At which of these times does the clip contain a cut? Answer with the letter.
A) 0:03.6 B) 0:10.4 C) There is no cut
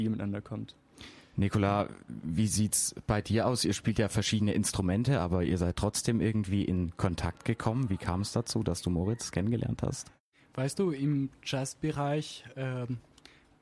C